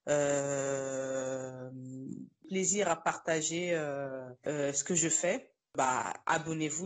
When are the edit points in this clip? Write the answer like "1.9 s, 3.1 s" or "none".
none